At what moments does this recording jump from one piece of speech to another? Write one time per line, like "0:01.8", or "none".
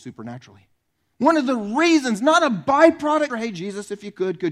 0:01.1
0:03.3